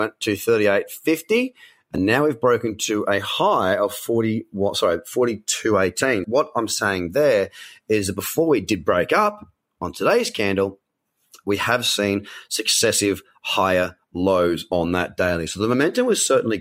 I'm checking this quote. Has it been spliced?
yes; 1 cut; at 6.2 s

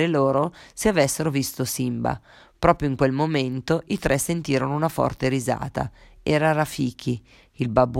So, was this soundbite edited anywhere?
no; 0 cuts

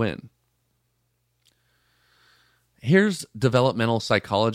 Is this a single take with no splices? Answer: yes; 0 cuts

